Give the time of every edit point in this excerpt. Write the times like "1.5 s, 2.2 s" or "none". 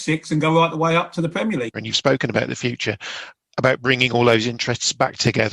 1.7 s

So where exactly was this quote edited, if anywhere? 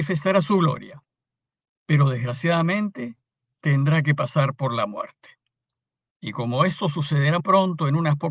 7.4 s

